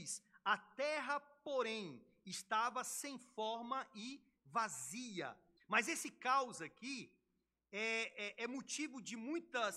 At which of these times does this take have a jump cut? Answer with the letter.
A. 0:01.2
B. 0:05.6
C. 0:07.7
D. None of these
B